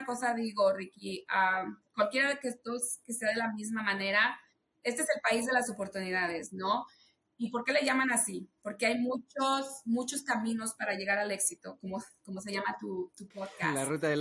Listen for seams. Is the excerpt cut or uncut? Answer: cut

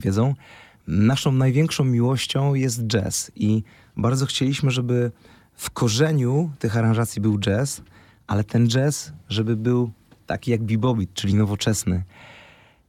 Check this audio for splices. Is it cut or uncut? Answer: uncut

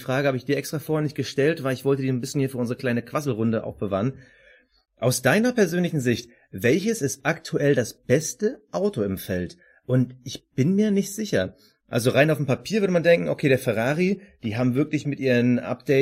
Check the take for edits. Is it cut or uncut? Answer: uncut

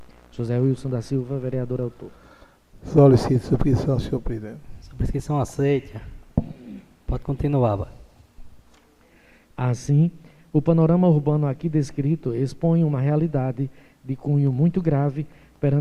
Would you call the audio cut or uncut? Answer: cut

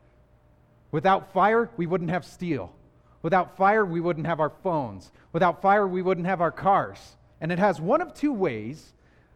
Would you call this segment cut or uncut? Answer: cut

